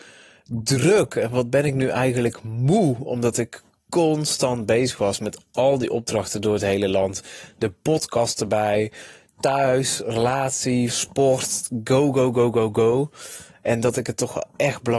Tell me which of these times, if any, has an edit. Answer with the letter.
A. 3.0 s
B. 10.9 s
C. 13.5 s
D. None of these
B